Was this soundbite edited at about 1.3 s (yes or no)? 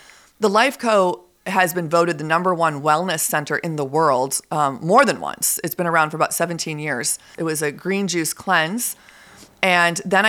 no